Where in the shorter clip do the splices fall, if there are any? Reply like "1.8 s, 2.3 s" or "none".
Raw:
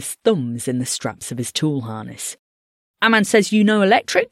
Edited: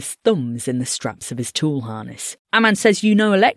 2.4 s